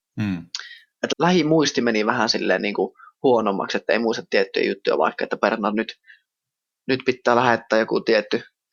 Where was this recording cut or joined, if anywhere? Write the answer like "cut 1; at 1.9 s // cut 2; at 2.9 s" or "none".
cut 1; at 1.1 s